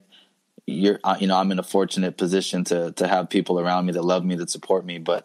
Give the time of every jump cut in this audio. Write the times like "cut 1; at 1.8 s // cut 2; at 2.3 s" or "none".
none